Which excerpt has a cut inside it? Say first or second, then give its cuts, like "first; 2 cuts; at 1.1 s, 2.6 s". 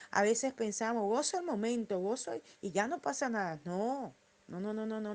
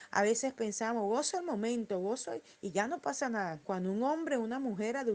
second; 1 cut; at 3.6 s